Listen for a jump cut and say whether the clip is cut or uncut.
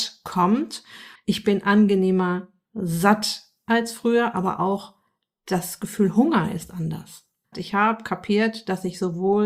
cut